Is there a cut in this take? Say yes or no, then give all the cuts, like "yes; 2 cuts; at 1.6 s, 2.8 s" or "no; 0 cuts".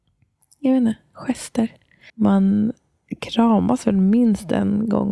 yes; 1 cut; at 2.1 s